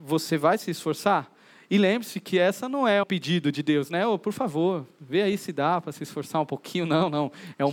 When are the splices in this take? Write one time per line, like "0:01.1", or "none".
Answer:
0:03.0